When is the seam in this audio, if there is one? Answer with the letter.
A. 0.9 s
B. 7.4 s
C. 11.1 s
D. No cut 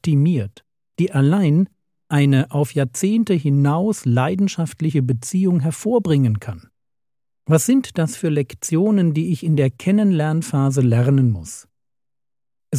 A